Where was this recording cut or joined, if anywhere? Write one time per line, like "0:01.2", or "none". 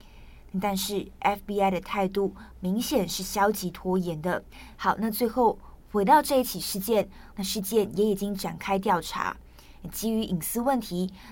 0:04.8
0:07.3